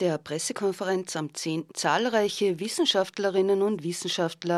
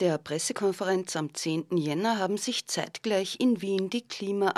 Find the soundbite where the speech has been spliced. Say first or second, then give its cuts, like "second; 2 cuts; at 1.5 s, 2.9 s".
first; 1 cut; at 1.7 s